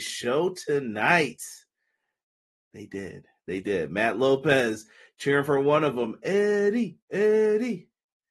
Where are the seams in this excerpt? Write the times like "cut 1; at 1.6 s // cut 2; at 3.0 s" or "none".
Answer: cut 1; at 7.0 s